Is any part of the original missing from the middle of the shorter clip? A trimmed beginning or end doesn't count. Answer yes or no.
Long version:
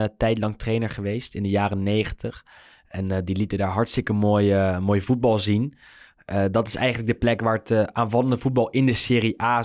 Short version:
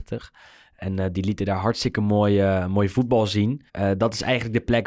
yes